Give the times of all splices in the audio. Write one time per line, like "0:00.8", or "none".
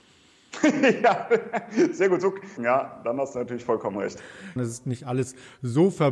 0:02.6
0:04.6